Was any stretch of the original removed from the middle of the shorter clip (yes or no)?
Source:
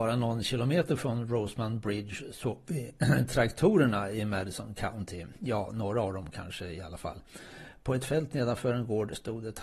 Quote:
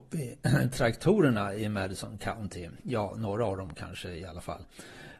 no